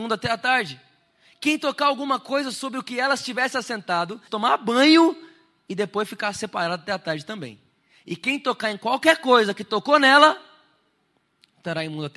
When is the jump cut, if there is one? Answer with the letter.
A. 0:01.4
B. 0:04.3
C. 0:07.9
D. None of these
B